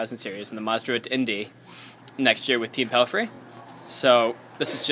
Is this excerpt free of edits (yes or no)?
yes